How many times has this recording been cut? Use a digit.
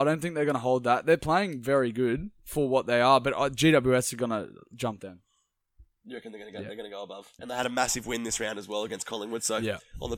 1